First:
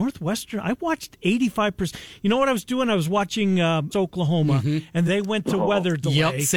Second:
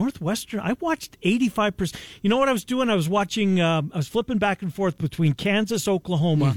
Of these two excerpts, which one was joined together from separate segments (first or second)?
first